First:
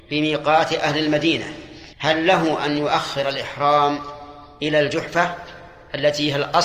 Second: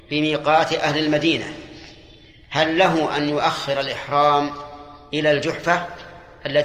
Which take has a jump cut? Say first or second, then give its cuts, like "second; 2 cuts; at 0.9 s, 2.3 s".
first; 1 cut; at 1.9 s